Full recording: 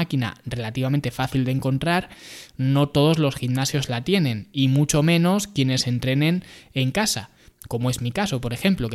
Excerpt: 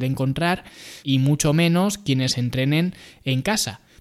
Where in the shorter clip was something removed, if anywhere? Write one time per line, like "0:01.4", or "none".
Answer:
0:01.0